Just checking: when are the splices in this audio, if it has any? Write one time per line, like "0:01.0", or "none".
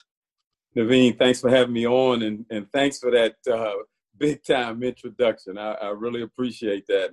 none